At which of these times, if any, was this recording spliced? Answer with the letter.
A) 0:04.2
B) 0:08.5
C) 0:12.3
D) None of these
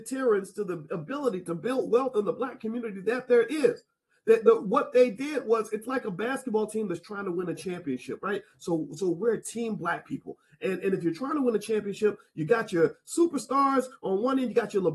D